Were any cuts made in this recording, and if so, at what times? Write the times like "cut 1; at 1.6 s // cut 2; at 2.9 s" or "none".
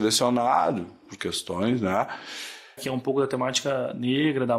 cut 1; at 2.8 s